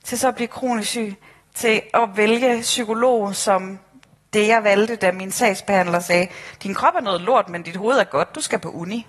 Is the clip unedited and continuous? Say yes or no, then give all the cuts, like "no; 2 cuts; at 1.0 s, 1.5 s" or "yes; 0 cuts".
yes; 0 cuts